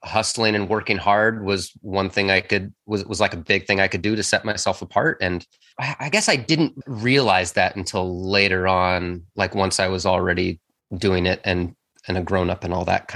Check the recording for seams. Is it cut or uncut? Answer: uncut